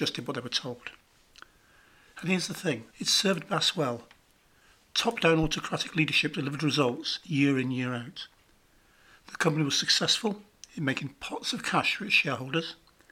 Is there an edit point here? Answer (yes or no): yes